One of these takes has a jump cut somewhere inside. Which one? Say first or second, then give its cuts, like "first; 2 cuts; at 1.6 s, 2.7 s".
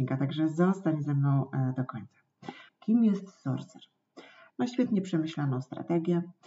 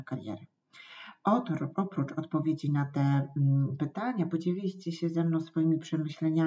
first; 2 cuts; at 2.7 s, 4.5 s